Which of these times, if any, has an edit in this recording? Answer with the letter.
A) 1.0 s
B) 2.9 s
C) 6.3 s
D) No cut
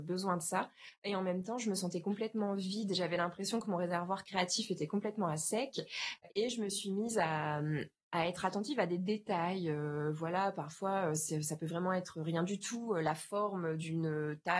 C